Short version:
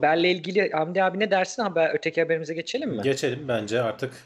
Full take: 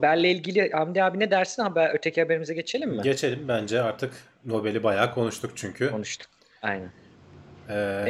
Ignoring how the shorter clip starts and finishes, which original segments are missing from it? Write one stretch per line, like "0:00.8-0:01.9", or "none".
none